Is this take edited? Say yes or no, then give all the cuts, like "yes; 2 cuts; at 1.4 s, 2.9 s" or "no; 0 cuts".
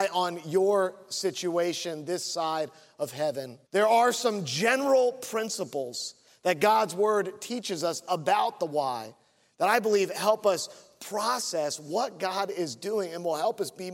yes; 1 cut; at 3.7 s